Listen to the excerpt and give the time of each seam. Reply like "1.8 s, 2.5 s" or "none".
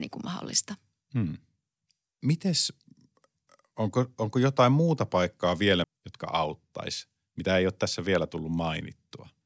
5.8 s